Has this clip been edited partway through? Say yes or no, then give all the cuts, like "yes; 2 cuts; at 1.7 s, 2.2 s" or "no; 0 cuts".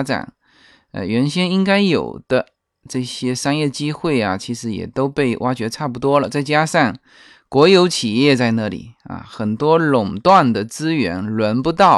no; 0 cuts